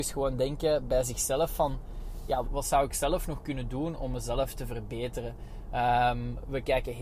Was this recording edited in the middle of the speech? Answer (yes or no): yes